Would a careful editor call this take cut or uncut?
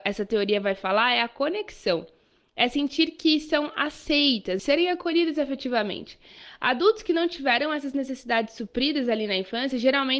cut